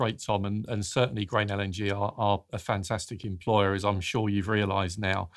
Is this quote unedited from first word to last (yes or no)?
yes